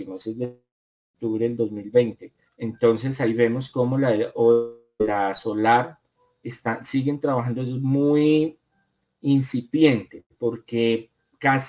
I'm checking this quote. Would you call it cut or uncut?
cut